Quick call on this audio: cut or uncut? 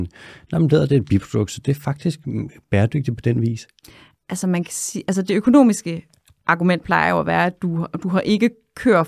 uncut